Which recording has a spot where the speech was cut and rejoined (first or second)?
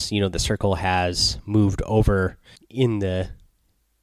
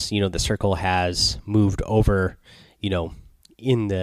first